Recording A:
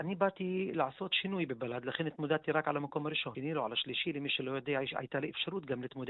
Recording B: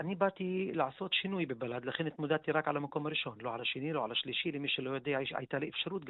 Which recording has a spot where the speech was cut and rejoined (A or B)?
A